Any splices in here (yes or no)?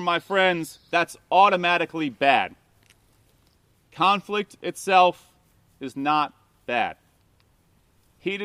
no